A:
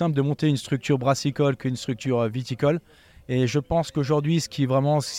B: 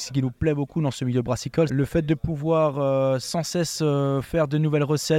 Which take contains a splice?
B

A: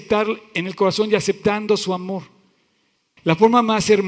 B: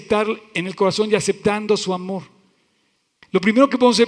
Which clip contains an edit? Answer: A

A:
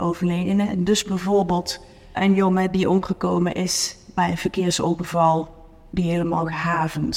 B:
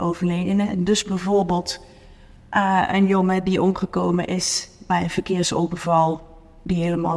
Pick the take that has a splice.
A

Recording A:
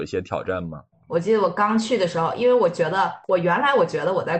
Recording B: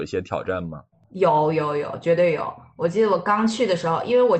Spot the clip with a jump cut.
A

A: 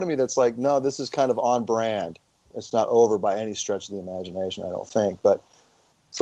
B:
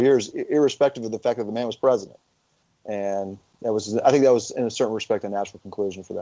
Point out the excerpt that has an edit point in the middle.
A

